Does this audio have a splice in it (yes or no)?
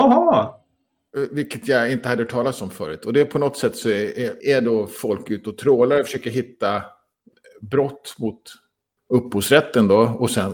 yes